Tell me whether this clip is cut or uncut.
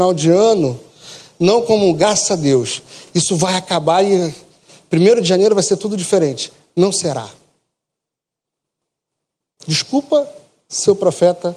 uncut